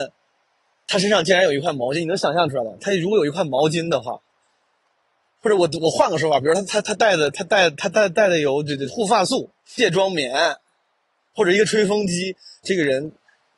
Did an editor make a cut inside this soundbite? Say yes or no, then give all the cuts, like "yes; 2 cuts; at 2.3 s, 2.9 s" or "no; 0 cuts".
yes; 2 cuts; at 9.6 s, 12.6 s